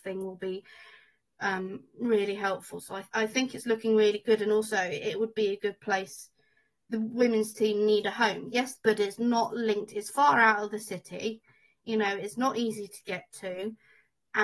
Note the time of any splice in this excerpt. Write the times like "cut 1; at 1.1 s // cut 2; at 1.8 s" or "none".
cut 1; at 8.7 s